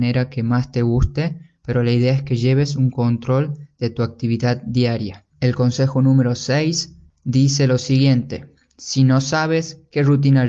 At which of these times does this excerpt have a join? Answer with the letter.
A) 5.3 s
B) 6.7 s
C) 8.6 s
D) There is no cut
A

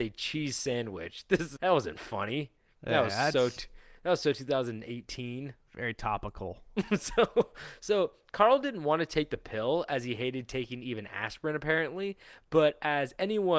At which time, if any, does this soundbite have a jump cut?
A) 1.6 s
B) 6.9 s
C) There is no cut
A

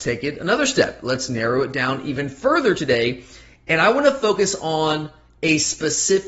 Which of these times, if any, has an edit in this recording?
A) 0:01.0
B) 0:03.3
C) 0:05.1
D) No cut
D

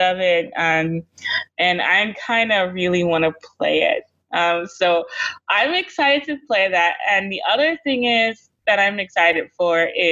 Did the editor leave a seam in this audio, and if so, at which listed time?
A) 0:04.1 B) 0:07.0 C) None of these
C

